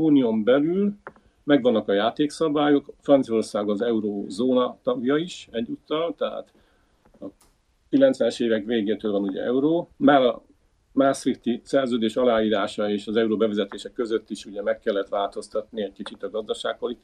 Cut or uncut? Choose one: cut